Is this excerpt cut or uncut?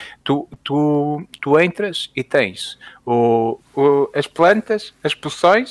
cut